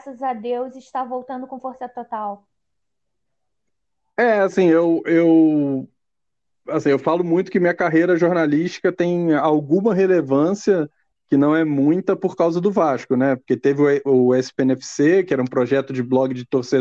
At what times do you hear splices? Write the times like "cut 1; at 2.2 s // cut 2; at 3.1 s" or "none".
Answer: none